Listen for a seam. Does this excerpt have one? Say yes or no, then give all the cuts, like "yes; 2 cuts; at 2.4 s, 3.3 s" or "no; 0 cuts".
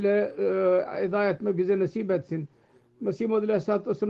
no; 0 cuts